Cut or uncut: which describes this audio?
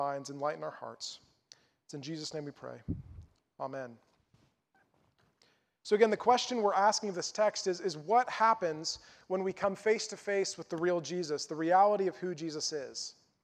uncut